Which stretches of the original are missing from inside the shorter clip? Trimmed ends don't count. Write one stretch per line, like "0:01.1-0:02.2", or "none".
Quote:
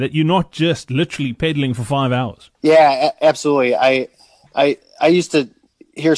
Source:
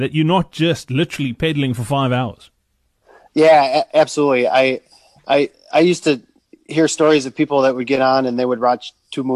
0:02.5-0:03.3

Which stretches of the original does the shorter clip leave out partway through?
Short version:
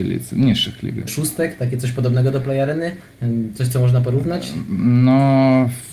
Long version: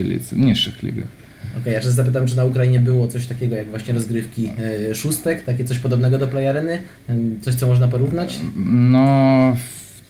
0:01.1-0:04.9

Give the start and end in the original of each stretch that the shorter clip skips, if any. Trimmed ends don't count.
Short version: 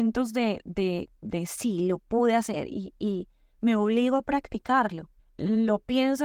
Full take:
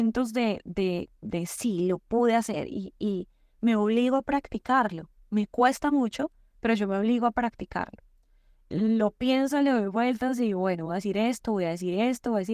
0:05.2-0:08.5

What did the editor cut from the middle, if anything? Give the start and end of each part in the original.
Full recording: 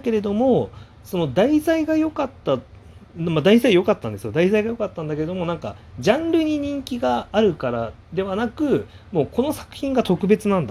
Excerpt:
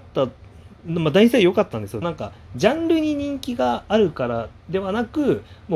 0:04.3-0:05.5

